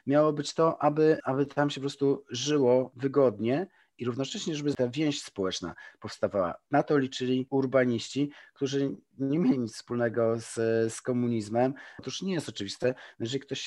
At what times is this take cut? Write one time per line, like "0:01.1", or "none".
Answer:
0:12.0